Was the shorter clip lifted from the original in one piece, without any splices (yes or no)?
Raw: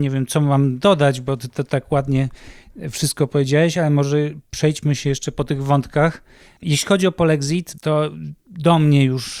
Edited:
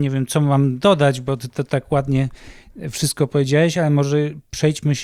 yes